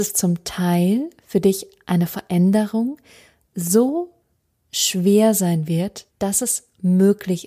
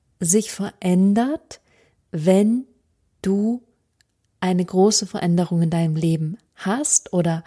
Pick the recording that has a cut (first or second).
first